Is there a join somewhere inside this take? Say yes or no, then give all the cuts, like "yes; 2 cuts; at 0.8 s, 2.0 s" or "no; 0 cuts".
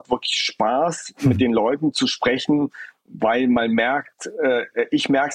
no; 0 cuts